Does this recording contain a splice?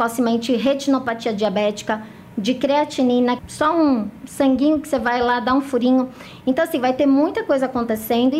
yes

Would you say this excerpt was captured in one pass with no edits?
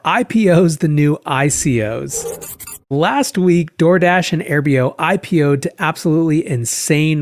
no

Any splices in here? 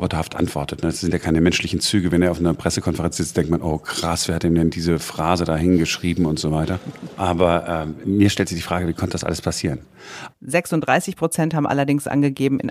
yes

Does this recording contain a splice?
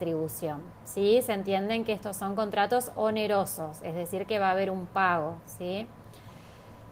no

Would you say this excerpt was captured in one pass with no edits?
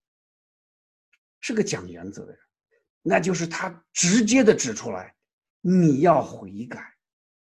no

